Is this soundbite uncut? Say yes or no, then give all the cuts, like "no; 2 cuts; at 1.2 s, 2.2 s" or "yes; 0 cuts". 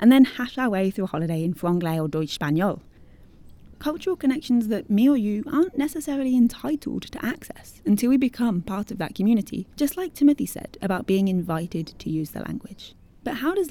no; 2 cuts; at 3.7 s, 9.7 s